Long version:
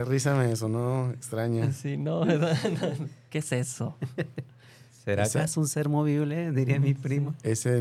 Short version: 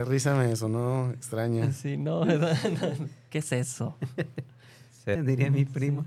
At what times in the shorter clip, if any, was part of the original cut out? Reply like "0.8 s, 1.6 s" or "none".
5.2 s